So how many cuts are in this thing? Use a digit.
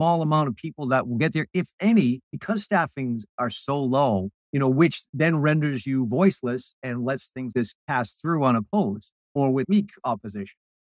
3